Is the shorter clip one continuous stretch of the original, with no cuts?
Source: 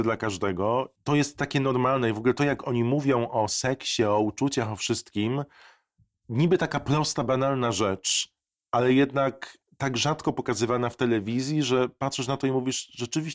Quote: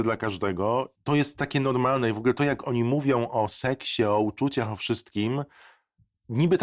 yes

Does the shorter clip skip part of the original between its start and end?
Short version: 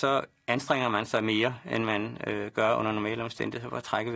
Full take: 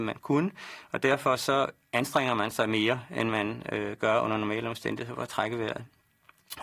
no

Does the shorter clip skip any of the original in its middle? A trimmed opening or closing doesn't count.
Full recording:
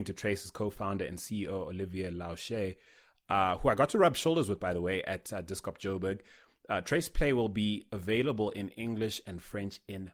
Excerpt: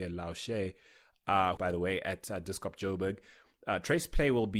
yes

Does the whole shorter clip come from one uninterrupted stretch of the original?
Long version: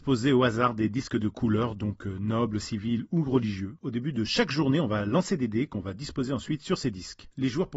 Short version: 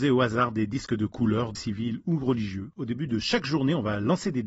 no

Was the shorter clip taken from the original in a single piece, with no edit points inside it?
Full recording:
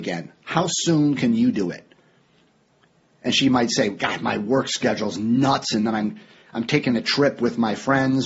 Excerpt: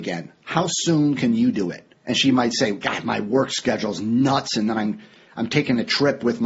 no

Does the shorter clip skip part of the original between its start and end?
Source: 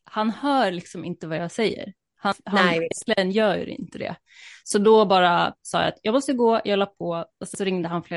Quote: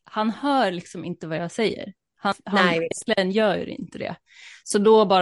no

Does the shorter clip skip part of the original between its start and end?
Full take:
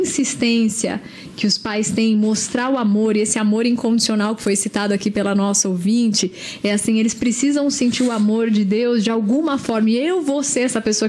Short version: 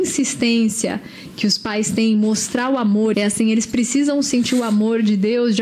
yes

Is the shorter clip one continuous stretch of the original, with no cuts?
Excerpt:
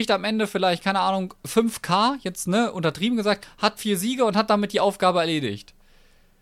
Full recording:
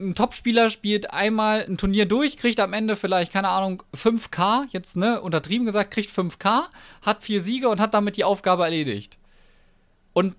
no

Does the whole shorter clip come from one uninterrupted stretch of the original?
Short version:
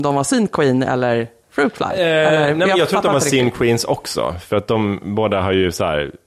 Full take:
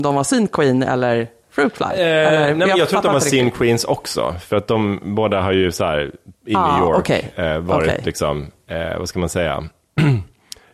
yes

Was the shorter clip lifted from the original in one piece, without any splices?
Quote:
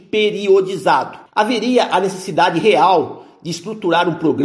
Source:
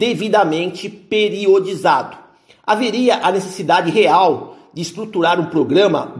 no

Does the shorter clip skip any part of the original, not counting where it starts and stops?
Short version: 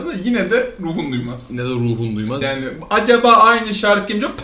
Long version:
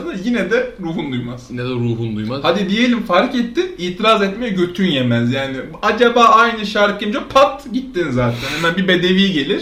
yes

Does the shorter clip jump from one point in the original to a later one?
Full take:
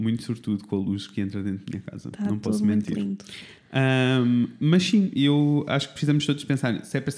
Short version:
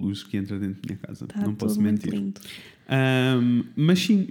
no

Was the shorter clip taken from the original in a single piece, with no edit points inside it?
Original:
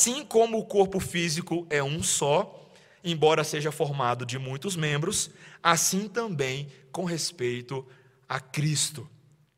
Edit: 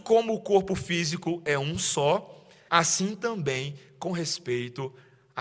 no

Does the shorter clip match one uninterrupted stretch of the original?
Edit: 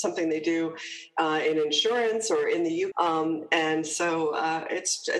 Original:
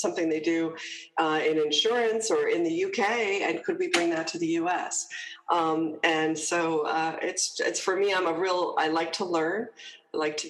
no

